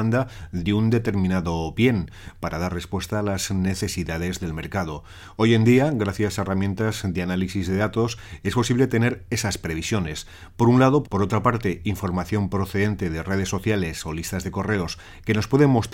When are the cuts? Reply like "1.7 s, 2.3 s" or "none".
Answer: 11.0 s